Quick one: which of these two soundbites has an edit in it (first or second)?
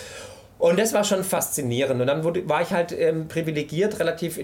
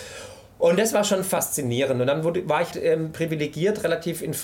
second